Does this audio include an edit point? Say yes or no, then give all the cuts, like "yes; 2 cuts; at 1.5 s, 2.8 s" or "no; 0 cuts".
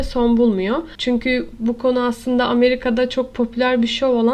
no; 0 cuts